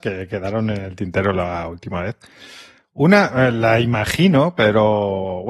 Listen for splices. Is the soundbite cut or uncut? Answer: uncut